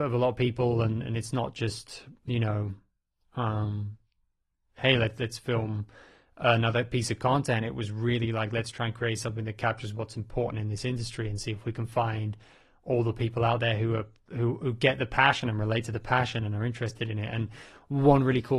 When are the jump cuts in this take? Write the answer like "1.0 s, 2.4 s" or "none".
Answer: none